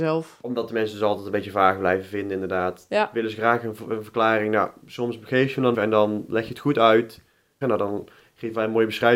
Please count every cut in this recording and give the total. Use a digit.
2